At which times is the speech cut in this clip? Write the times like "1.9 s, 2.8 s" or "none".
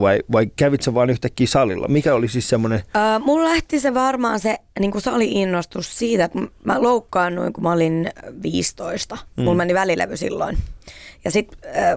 none